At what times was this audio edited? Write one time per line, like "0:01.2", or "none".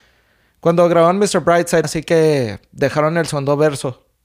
0:01.8